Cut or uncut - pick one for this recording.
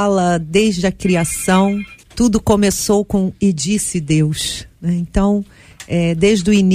cut